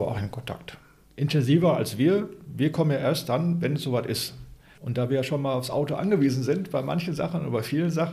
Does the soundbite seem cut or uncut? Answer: cut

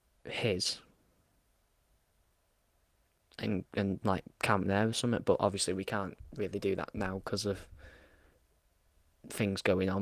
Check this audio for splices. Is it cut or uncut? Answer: uncut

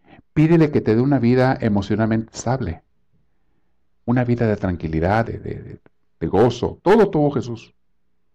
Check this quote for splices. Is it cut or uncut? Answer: cut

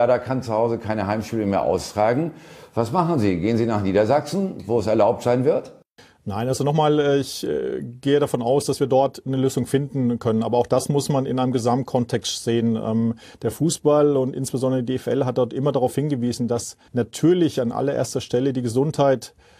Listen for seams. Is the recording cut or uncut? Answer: cut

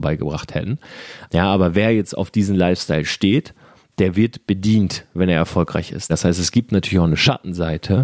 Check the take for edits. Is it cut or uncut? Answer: cut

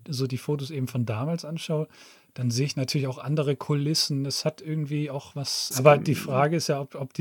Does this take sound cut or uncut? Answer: cut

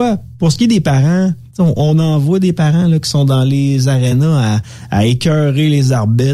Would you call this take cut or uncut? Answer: cut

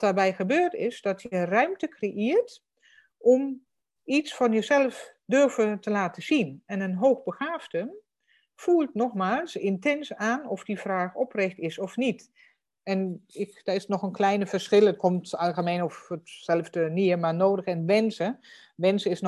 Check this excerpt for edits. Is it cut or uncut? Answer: cut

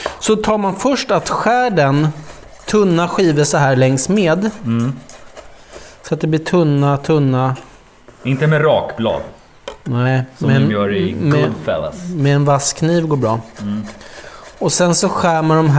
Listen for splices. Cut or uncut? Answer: uncut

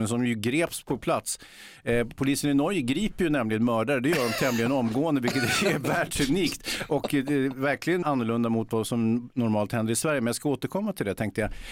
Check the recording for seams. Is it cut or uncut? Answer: cut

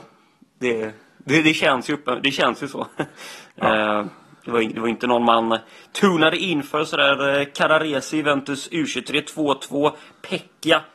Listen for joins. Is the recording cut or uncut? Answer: uncut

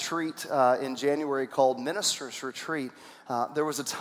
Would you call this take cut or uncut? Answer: uncut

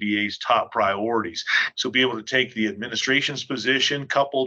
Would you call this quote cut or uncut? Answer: cut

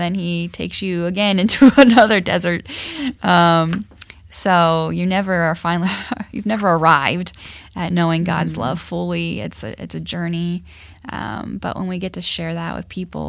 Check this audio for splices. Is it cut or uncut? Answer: uncut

